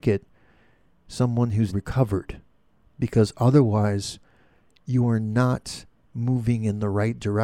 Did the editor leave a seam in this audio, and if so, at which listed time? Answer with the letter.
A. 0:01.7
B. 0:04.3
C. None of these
A